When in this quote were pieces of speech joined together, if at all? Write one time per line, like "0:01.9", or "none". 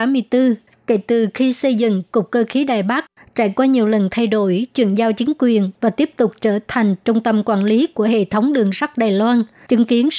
0:03.2

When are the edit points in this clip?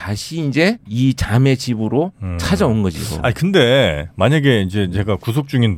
none

